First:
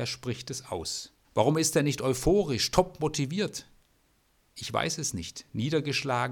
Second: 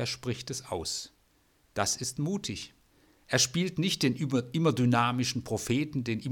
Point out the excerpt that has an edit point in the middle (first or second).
first